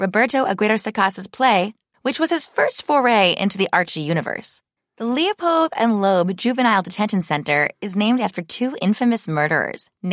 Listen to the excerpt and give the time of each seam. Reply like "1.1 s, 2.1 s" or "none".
1.9 s, 4.8 s